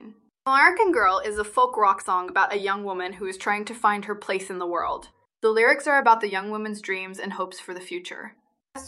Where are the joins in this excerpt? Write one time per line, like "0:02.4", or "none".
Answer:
0:05.3